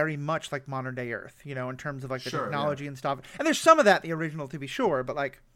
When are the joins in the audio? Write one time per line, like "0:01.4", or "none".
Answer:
none